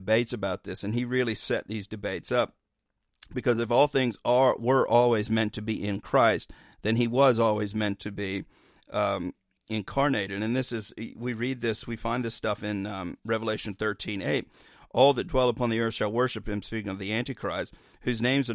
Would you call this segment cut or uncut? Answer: uncut